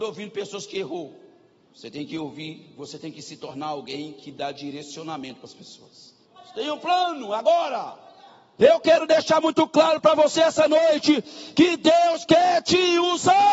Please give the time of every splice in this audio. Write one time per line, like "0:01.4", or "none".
0:06.4
0:08.6